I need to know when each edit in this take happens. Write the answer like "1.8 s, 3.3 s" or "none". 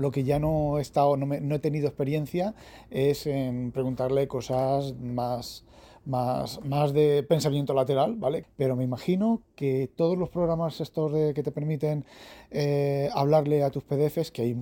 8.4 s